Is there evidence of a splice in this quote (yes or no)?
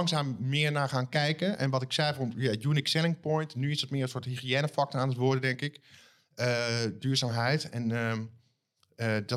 no